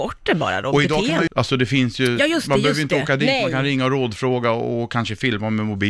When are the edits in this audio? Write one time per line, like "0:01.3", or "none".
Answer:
0:01.3